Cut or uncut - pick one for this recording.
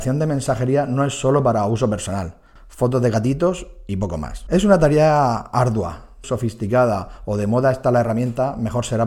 cut